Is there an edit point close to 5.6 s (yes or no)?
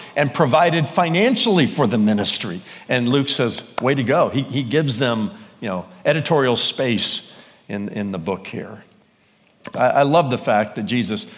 no